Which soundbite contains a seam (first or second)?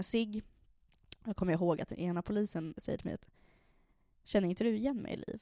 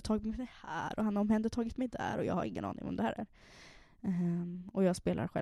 first